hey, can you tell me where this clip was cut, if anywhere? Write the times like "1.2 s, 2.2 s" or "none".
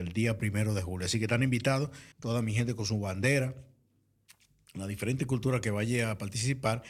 2.1 s